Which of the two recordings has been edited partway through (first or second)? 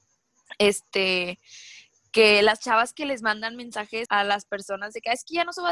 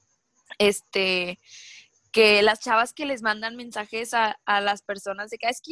first